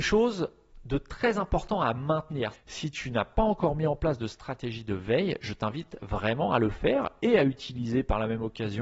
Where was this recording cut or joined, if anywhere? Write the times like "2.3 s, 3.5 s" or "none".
2.5 s